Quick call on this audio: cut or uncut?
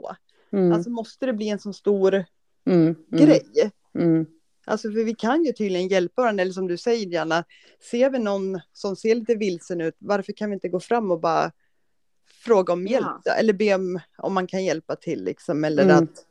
uncut